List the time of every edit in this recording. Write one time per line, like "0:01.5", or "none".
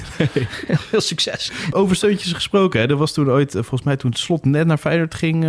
0:01.7